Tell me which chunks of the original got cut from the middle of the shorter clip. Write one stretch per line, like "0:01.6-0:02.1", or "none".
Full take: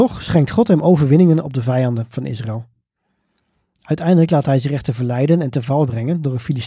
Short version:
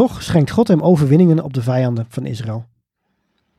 none